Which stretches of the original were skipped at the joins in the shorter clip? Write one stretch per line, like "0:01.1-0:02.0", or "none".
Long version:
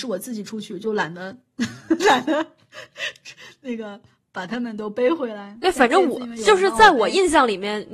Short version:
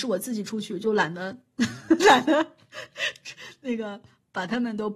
none